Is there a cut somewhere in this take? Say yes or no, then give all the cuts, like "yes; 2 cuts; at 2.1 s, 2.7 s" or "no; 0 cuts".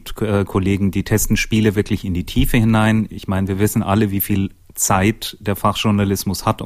no; 0 cuts